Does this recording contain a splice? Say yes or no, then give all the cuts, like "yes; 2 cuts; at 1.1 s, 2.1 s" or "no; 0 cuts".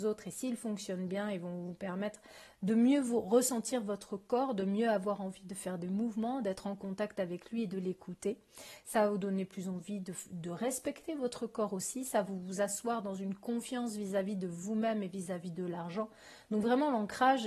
no; 0 cuts